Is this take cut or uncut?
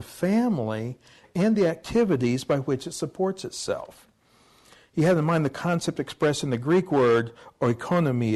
uncut